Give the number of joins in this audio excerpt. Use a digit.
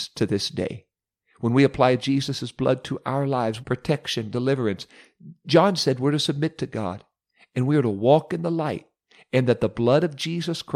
1